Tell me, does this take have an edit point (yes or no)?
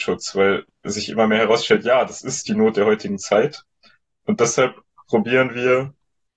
no